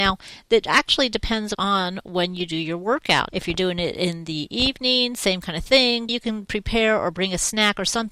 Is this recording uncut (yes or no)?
no